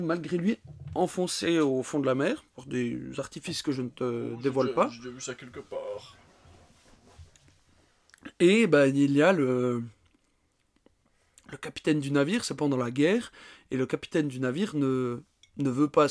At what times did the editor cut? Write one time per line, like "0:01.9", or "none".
none